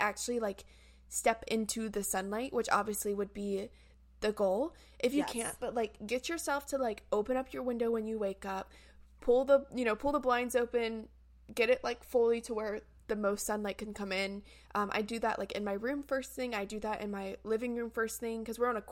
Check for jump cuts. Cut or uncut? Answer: uncut